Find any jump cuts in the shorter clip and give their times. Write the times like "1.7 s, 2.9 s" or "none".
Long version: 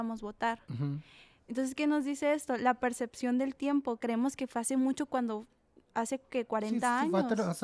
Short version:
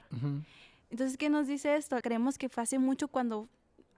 2.0 s